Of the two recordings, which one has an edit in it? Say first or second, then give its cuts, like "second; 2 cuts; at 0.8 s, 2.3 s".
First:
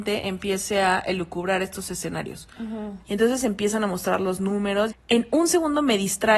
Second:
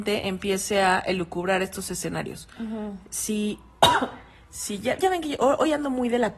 first; 2 cuts; at 3.0 s, 4.9 s